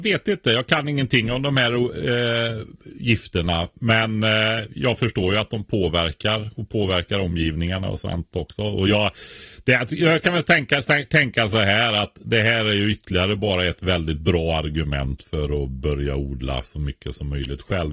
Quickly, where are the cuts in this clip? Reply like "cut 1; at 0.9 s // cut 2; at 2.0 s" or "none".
none